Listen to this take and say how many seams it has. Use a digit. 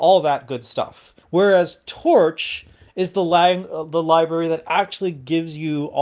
1